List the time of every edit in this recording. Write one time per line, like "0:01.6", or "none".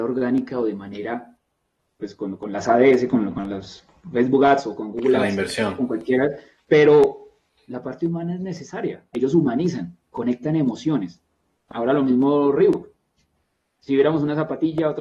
0:09.1